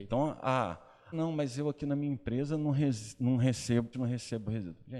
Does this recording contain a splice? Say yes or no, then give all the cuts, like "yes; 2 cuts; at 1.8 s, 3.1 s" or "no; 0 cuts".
yes; 2 cuts; at 1.1 s, 3.9 s